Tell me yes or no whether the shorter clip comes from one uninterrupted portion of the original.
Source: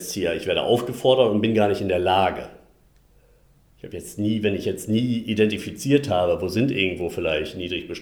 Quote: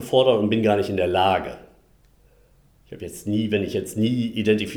yes